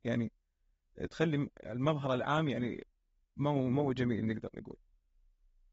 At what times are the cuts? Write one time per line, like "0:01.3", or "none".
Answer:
0:01.1